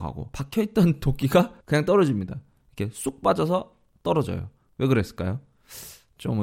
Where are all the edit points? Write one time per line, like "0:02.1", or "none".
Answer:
none